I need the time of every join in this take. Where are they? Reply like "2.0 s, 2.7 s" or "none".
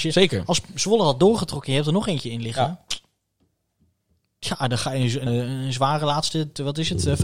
5.3 s